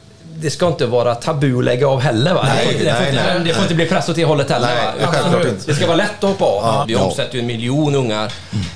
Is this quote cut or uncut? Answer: cut